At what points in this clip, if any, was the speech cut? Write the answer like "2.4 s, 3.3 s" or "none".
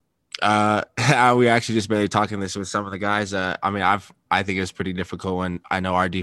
none

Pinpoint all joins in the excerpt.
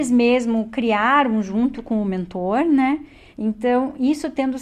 3.3 s

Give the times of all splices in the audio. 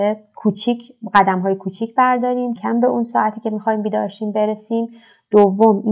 2.6 s

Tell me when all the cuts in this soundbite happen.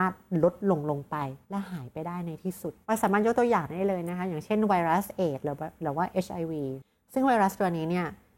1.4 s, 2.8 s

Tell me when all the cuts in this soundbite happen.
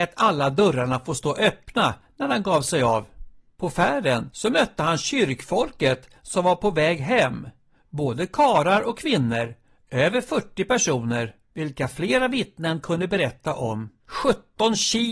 14.0 s

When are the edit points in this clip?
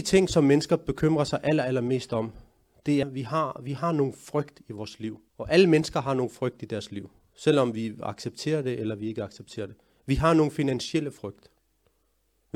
3.0 s, 5.3 s

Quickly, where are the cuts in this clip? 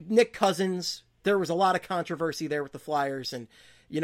none

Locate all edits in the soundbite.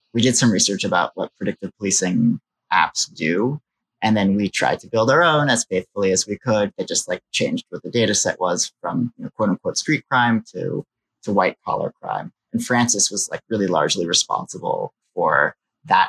none

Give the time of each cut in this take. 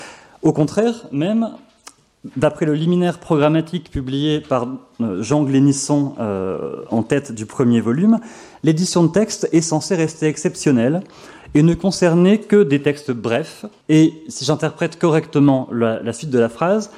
13.8 s

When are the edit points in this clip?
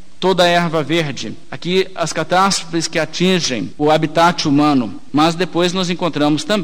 5.1 s

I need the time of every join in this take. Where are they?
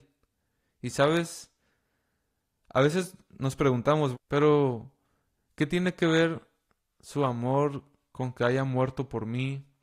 4.1 s

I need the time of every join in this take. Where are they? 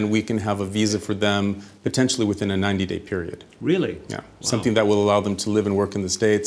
none

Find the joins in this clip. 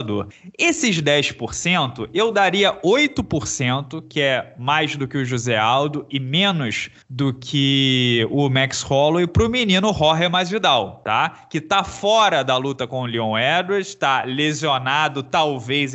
none

